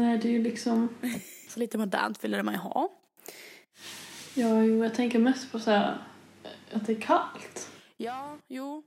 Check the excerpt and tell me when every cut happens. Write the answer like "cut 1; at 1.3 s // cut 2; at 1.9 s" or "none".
cut 1; at 1.5 s